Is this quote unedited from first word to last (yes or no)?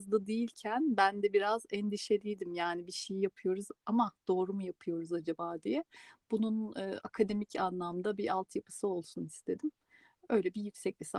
yes